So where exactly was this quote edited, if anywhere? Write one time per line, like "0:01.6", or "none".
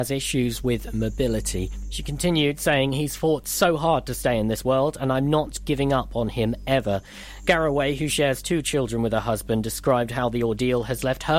none